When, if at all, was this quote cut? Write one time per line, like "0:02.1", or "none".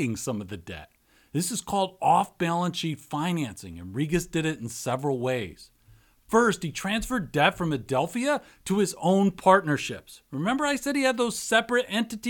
none